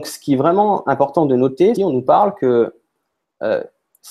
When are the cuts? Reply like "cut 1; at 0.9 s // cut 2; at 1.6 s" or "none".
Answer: cut 1; at 1.8 s